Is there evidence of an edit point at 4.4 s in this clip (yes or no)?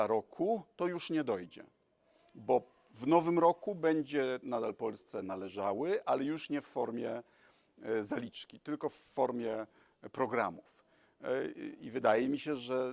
yes